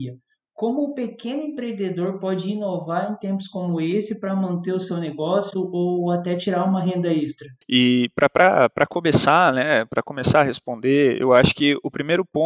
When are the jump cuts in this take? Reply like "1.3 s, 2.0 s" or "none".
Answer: 7.6 s